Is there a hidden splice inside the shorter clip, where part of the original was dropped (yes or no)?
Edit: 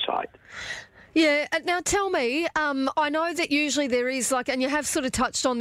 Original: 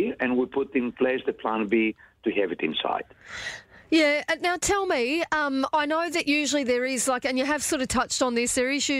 no